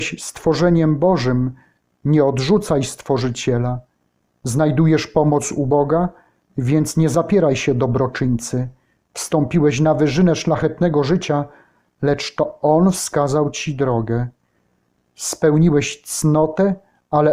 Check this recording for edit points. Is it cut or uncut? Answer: uncut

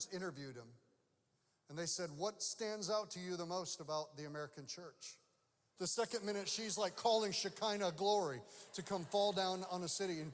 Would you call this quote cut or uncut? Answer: cut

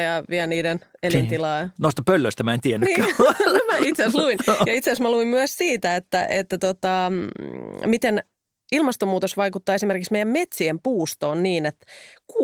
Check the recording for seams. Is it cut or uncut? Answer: uncut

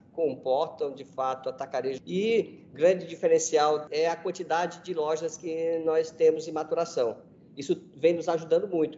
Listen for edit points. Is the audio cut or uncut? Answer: cut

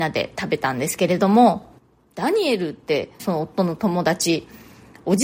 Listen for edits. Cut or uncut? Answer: cut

